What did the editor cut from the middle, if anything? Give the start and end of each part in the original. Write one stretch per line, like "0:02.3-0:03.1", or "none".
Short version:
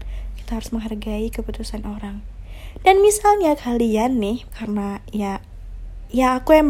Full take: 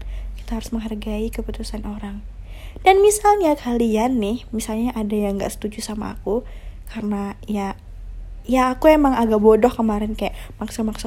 0:04.5-0:06.8